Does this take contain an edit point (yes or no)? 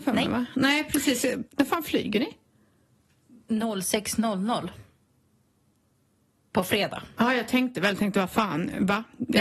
yes